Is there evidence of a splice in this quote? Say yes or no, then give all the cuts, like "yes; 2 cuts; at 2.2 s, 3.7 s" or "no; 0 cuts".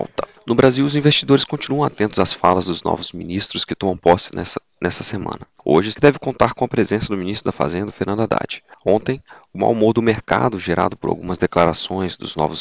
yes; 1 cut; at 5.9 s